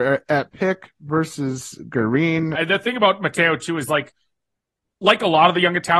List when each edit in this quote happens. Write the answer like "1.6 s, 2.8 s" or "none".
2.5 s